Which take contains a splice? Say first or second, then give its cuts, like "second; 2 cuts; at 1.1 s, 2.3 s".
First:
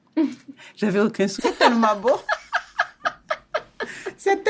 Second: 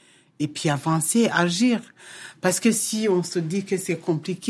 first; 1 cut; at 1.4 s